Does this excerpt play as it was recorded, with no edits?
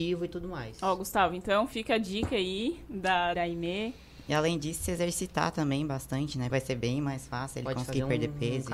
no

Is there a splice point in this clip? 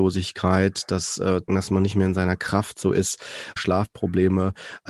yes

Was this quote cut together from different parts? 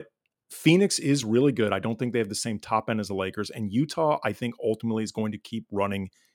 no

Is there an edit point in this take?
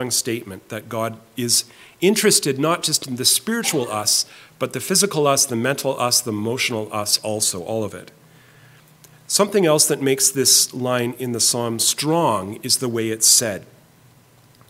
no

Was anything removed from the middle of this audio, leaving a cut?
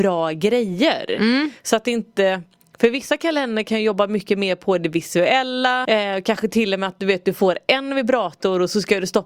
yes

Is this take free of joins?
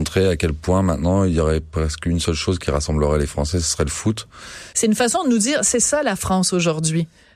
no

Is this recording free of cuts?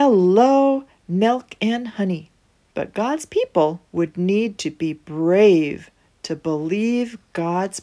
no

